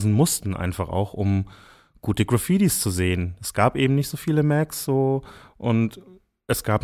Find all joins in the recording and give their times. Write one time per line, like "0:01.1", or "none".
none